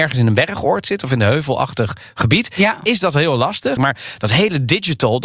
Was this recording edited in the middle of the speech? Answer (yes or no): yes